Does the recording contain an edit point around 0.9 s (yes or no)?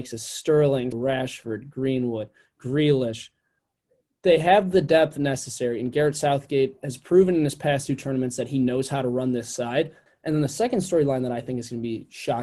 yes